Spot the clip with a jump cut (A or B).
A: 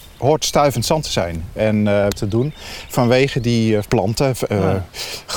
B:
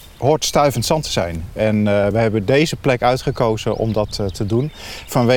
A